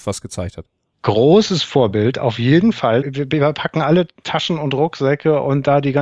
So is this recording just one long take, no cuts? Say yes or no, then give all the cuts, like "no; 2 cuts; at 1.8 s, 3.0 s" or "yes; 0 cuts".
no; 1 cut; at 3.0 s